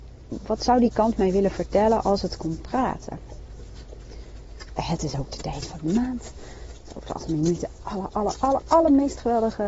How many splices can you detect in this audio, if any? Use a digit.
1